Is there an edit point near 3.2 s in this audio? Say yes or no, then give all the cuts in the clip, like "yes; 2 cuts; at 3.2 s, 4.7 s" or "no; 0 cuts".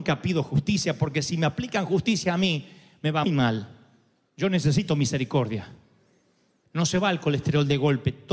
yes; 2 cuts; at 3.2 s, 6.6 s